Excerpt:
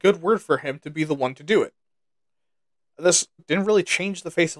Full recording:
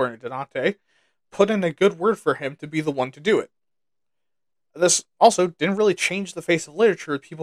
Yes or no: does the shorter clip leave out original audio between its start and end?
yes